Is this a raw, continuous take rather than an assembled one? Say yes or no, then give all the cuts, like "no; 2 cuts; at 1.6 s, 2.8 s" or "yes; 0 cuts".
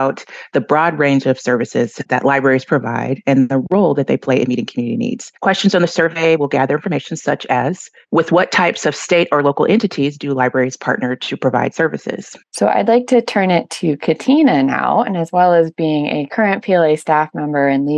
no; 2 cuts; at 5.4 s, 12.4 s